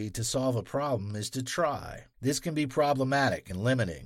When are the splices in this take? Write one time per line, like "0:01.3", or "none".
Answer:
0:02.1